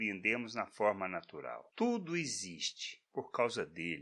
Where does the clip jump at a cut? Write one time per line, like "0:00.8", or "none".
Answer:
0:01.7